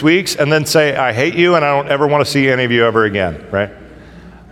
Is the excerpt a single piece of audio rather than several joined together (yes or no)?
yes